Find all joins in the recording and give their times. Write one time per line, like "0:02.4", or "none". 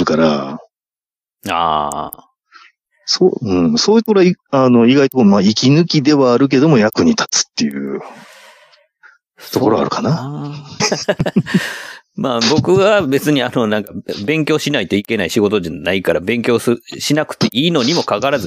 0:10.8